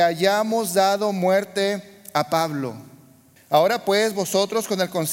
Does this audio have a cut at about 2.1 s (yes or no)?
no